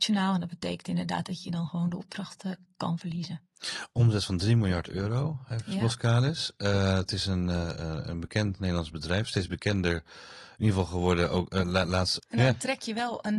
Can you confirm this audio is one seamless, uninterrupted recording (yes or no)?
no